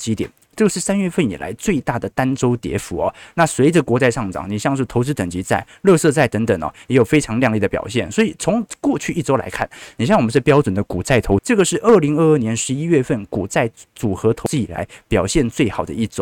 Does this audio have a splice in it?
yes; 1 cut; at 11.4 s

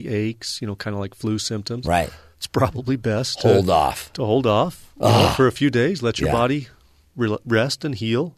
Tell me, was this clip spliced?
no; 0 cuts

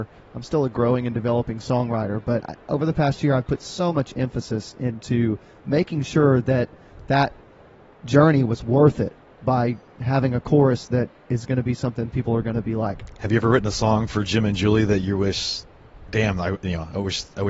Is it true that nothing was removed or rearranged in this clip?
yes; 0 cuts

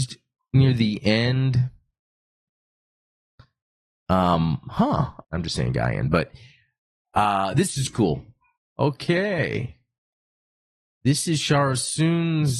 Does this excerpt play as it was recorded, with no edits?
no; 2 cuts; at 5.2 s, 8.6 s

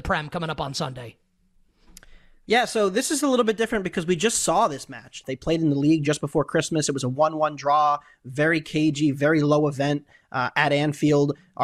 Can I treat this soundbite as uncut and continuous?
no; 1 cut; at 5.2 s

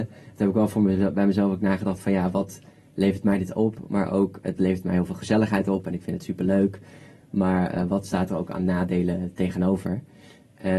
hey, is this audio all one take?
yes; 0 cuts

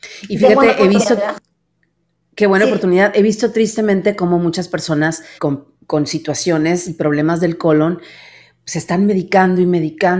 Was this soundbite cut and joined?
yes; 1 cut; at 5.4 s

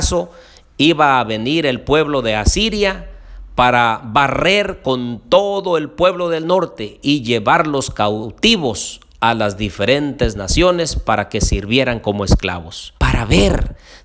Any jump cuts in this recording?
yes; 1 cut; at 13.0 s

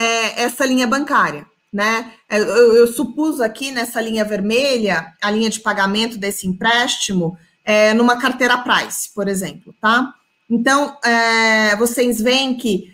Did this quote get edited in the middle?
no; 0 cuts

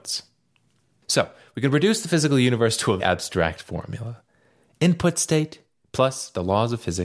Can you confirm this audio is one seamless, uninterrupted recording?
no; 1 cut; at 3.0 s

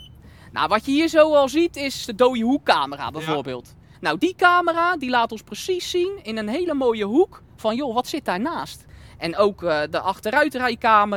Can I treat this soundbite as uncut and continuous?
yes; 0 cuts

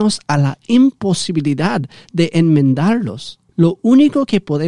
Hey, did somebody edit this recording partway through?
yes; 1 cut; at 3.5 s

